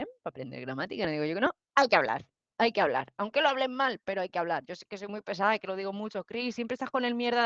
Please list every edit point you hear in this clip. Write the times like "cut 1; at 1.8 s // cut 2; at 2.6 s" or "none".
none